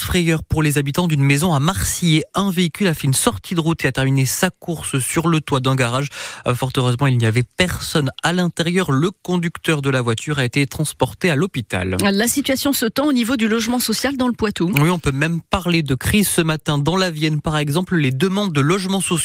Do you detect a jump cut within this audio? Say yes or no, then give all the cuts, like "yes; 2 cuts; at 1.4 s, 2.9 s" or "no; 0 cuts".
no; 0 cuts